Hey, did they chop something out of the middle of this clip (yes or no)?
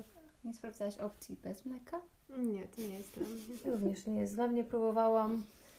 no